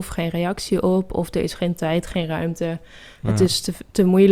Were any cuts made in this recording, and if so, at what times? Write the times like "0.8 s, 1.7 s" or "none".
none